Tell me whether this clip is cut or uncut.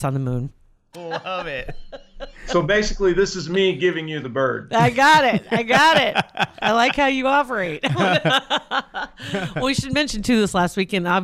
cut